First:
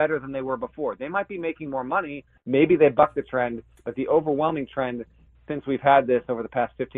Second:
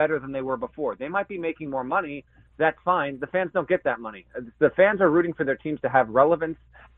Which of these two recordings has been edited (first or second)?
first